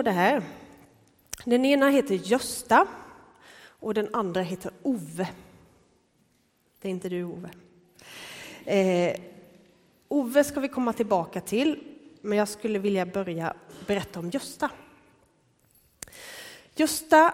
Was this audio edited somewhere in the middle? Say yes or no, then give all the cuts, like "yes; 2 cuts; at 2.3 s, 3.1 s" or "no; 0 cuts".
no; 0 cuts